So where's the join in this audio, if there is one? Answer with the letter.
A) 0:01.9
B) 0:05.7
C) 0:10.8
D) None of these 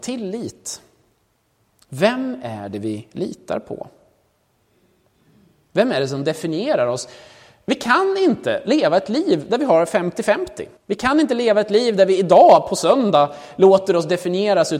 C